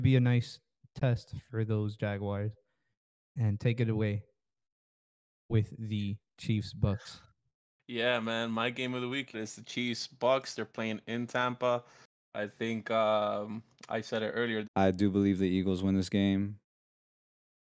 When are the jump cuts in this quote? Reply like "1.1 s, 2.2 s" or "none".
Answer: 9.3 s, 14.6 s